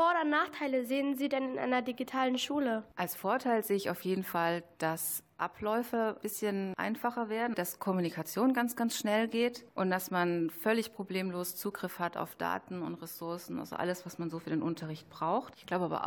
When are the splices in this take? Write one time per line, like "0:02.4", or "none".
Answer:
0:07.5